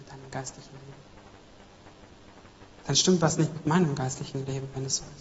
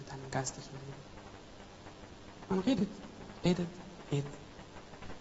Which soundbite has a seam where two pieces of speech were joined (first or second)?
second